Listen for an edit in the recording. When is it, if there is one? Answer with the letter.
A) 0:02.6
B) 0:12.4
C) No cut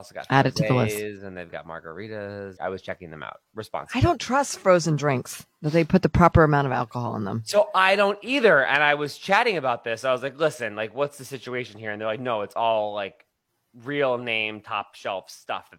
A